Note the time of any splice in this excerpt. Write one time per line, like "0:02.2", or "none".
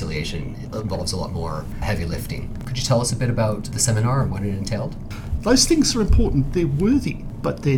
0:02.6
0:05.4